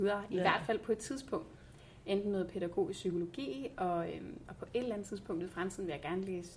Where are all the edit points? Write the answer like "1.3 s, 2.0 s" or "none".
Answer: none